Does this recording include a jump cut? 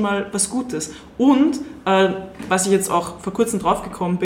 no; 0 cuts

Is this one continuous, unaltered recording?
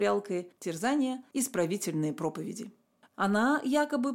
no; 1 cut; at 3.1 s

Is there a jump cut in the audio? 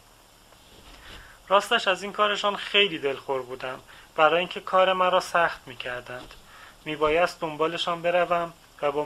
no; 0 cuts

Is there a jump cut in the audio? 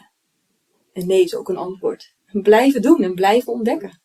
yes; 1 cut; at 2.2 s

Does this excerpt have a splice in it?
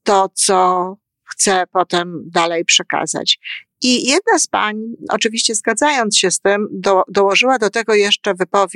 no; 0 cuts

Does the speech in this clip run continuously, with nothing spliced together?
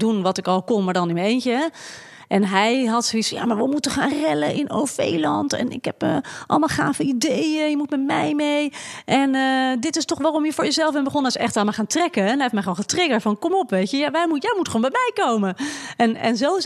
yes; 0 cuts

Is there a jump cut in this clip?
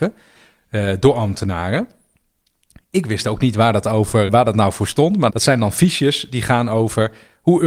yes; 2 cuts; at 4.3 s, 5.3 s

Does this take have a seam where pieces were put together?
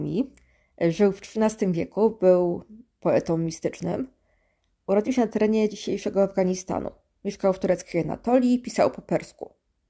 no; 0 cuts

